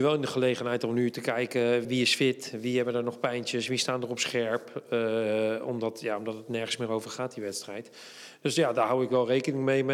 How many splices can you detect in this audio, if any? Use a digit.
1